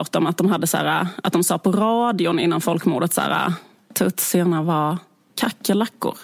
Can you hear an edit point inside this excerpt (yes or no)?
no